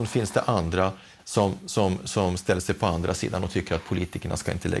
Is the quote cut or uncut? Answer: uncut